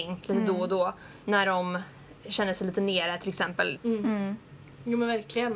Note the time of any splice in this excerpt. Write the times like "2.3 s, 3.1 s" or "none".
1.2 s, 3.8 s